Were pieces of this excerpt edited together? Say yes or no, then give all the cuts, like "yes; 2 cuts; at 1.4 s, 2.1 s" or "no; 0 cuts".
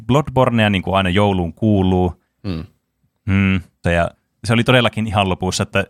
yes; 2 cuts; at 2.4 s, 3.8 s